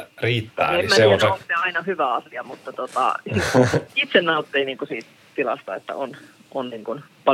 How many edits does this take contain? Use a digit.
1